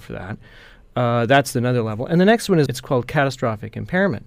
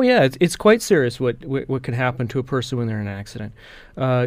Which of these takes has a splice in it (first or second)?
first